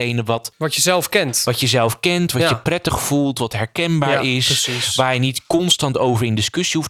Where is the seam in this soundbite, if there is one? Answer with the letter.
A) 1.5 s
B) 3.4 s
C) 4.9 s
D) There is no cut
D